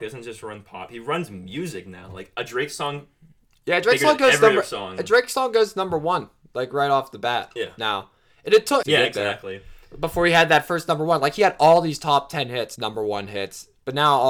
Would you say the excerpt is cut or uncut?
cut